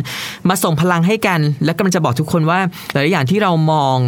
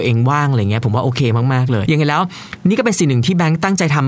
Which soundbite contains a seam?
second; 1 cut; at 1.9 s

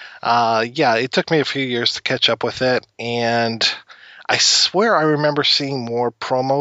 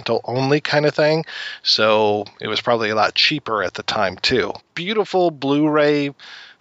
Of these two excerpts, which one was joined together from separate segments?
second; 1 cut; at 4.6 s

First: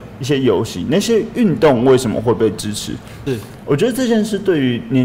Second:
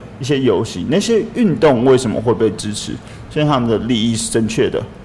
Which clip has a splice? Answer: first; 1 cut; at 3.3 s

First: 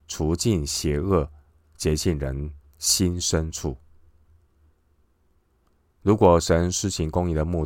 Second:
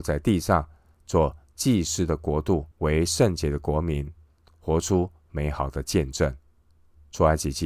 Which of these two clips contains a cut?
second; 1 cut; at 2.7 s

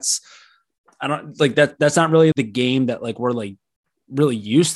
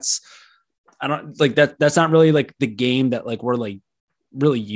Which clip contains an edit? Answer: first; 1 cut; at 2.3 s

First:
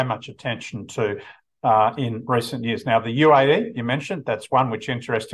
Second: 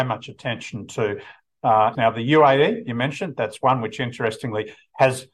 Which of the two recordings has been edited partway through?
second; 1 cut; at 1.9 s

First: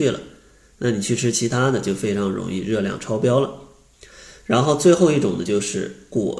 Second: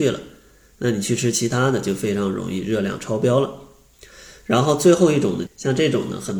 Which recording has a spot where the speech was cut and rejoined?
second; 1 cut; at 5.5 s

